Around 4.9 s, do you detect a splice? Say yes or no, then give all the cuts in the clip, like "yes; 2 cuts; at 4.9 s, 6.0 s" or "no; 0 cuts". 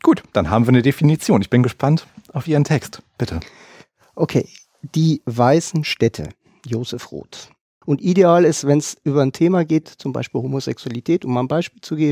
no; 2 cuts; at 7.8 s, 9.8 s